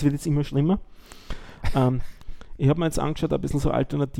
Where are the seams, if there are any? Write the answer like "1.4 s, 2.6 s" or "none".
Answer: none